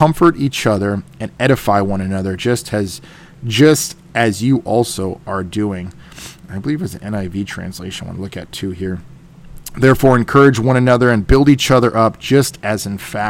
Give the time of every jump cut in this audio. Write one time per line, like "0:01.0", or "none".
none